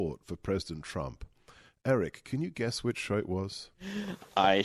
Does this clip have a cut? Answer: no; 0 cuts

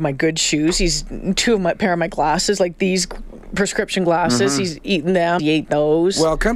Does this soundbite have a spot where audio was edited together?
yes; 1 cut; at 5.4 s

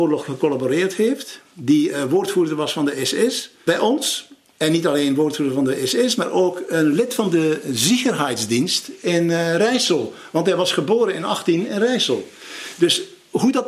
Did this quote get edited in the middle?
no; 0 cuts

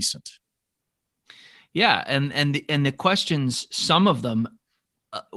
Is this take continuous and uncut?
yes; 0 cuts

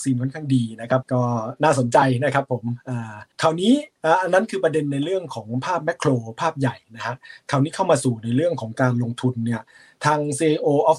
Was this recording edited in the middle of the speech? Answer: yes; 1 cut; at 3.3 s

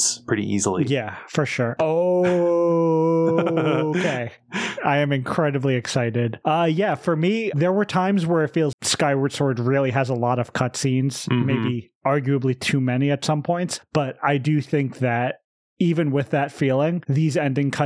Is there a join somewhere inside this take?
yes; 2 cuts; at 1.8 s, 8.7 s

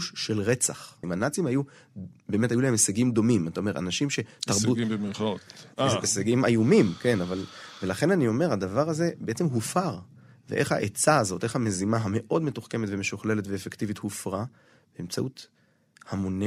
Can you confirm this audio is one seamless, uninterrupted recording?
no; 1 cut; at 1.0 s

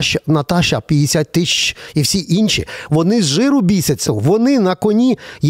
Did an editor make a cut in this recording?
yes; 1 cut; at 4.1 s

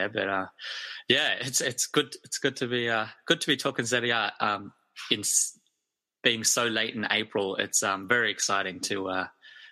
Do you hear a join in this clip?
no; 0 cuts

